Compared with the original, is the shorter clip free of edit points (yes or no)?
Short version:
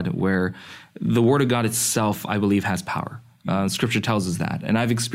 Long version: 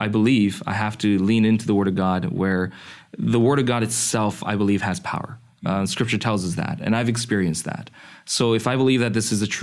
yes